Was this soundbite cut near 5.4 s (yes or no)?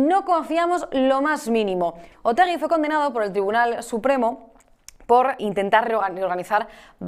yes